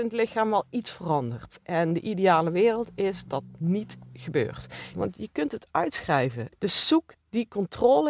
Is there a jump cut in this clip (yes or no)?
yes